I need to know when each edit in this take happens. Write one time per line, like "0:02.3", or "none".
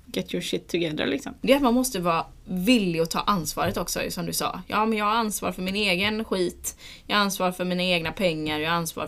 0:01.4